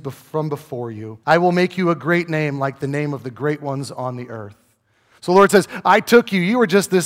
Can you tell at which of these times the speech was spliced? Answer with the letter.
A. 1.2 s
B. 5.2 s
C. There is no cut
A